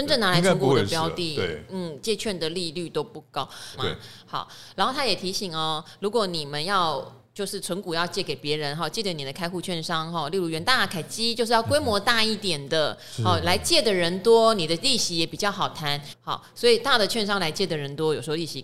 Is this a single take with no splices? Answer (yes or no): no